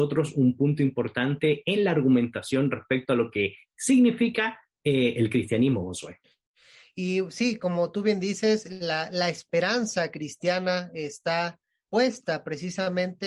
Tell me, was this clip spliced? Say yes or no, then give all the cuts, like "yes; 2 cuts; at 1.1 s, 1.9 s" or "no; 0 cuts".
no; 0 cuts